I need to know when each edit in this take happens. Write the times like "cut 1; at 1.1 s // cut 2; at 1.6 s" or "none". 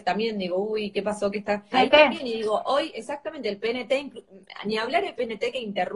cut 1; at 1.7 s